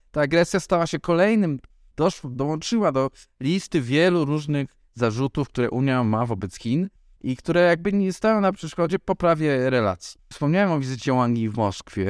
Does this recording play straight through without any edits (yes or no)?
no